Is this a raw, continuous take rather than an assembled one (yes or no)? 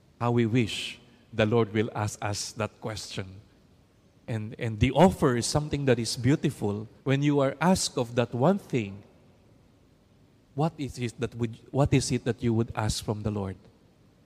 no